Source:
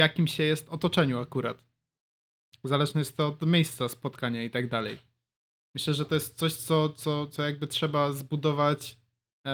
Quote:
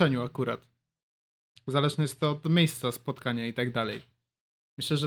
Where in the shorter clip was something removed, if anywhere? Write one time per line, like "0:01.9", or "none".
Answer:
none